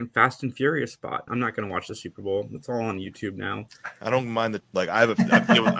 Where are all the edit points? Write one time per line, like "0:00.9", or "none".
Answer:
0:01.3
0:04.6